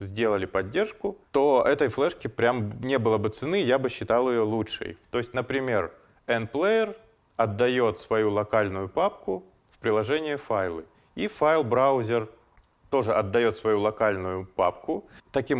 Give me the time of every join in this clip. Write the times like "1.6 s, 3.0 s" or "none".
5.0 s